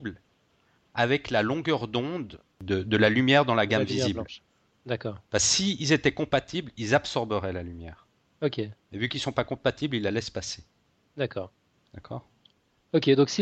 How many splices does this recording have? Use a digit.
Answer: 0